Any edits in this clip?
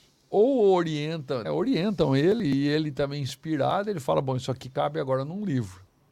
yes; 1 cut; at 1.4 s

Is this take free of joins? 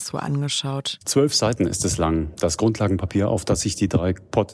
yes; 0 cuts

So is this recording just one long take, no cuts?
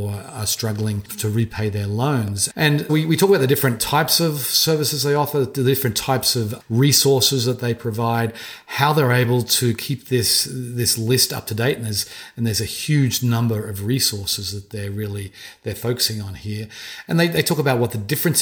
no; 1 cut; at 2.9 s

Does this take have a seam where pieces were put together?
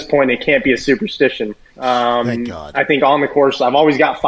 yes; 1 cut; at 1.7 s

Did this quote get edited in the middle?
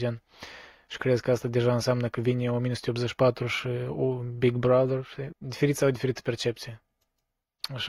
yes; 1 cut; at 5.3 s

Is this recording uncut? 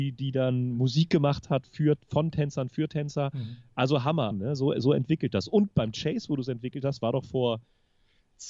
no; 1 cut; at 4.3 s

